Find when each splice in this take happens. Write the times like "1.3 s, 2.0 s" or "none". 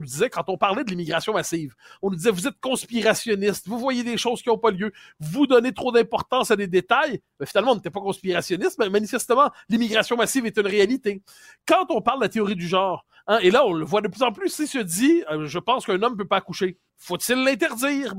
16.9 s

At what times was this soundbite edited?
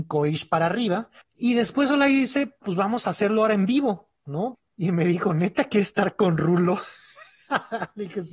1.2 s, 2.6 s, 4.5 s

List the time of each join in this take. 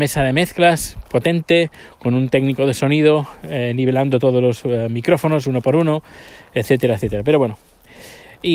none

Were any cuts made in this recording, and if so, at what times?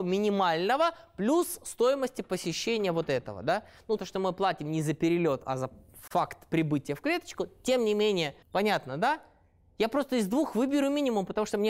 4.0 s, 8.4 s

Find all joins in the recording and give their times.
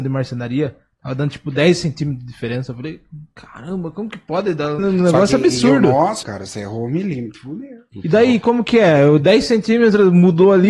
4.8 s, 6.2 s

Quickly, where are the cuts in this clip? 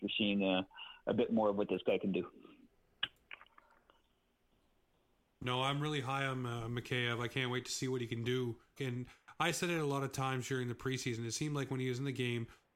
8.8 s

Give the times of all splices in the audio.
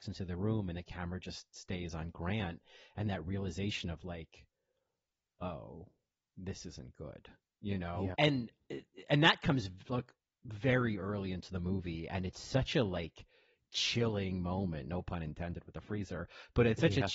8.1 s

